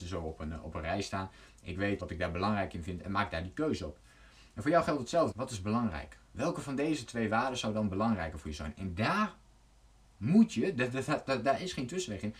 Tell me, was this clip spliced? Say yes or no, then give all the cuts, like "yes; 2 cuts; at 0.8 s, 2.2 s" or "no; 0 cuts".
yes; 2 cuts; at 2.0 s, 5.3 s